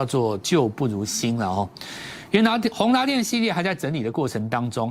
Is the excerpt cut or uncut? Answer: uncut